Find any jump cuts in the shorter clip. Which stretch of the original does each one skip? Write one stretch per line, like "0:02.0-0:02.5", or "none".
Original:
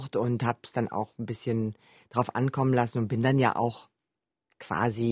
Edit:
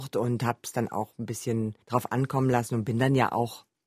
0:01.8-0:02.1